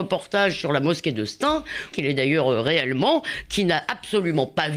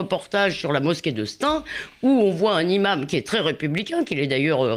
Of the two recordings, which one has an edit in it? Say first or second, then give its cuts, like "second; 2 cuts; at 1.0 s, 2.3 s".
first; 1 cut; at 1.9 s